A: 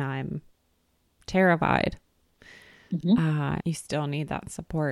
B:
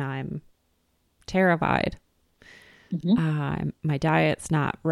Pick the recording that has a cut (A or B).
A